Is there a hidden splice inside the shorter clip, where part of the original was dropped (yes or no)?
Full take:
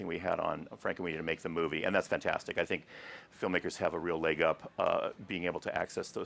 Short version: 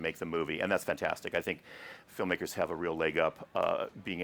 no